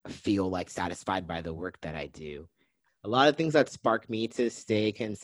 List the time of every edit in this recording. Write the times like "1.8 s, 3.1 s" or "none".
2.9 s